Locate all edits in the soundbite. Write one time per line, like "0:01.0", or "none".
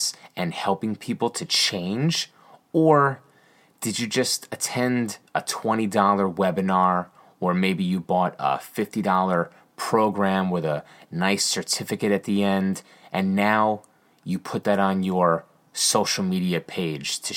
0:05.3